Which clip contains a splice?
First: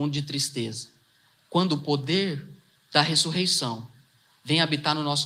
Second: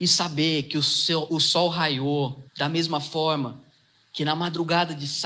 second; 2 cuts; at 1.3 s, 2.5 s

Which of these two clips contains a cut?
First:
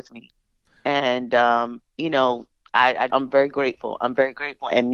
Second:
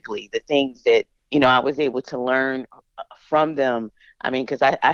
first; 2 cuts; at 1.9 s, 3.1 s

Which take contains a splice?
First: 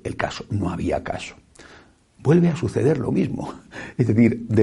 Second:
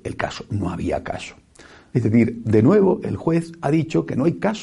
second; 1 cut; at 1.9 s

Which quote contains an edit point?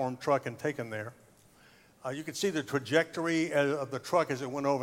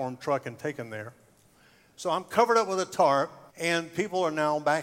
second; 2 cuts; at 1.9 s, 3.5 s

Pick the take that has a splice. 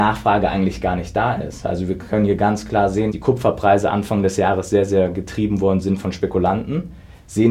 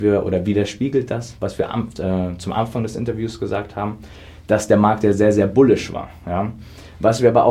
first; 1 cut; at 3.1 s

